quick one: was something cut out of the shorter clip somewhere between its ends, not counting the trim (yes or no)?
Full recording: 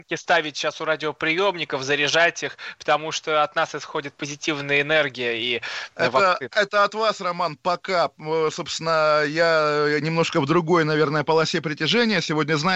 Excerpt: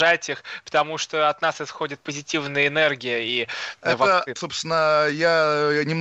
yes